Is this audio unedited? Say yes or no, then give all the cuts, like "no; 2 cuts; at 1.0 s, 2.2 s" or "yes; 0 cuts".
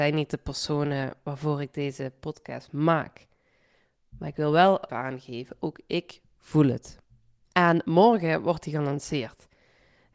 no; 2 cuts; at 4.9 s, 7.5 s